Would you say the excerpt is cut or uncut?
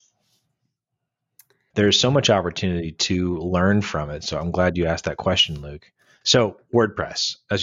cut